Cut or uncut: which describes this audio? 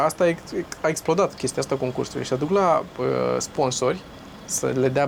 uncut